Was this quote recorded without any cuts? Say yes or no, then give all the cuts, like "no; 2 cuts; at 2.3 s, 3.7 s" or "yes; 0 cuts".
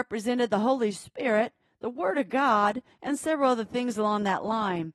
no; 1 cut; at 2.9 s